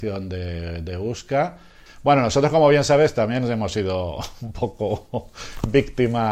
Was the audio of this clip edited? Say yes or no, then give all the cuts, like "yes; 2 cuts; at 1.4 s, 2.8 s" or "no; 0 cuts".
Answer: yes; 1 cut; at 1.9 s